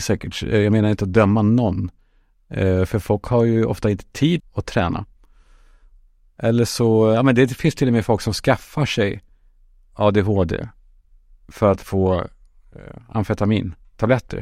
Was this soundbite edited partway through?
yes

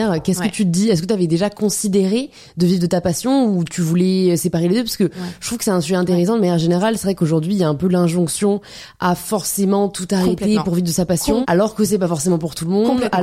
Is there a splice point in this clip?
yes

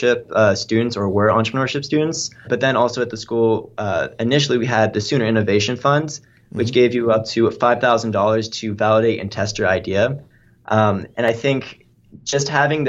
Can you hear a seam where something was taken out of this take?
yes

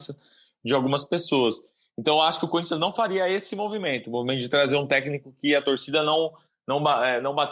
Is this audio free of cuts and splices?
yes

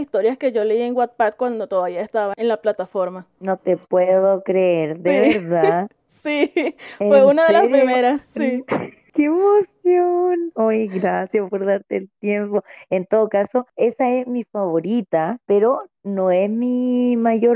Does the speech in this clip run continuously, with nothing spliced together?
yes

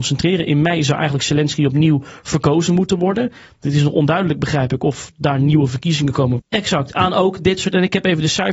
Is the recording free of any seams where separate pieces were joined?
no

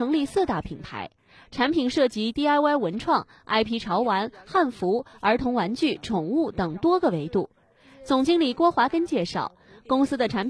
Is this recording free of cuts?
yes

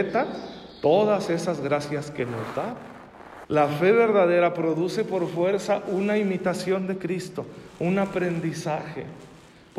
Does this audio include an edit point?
yes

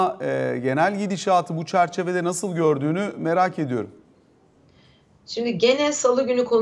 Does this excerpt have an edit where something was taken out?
no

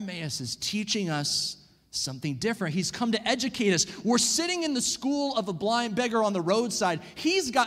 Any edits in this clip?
no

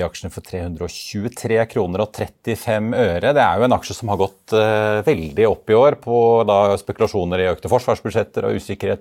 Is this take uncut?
yes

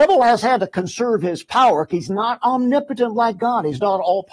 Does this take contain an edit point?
no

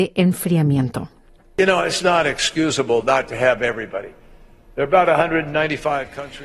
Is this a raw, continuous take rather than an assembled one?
no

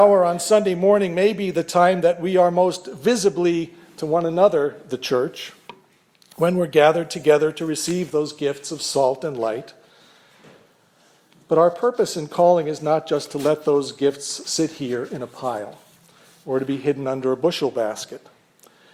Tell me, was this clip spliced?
no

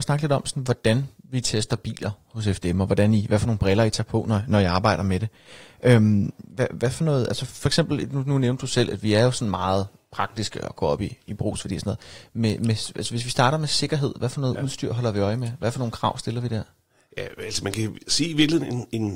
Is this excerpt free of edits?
yes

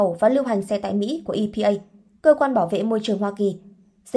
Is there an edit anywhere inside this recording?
no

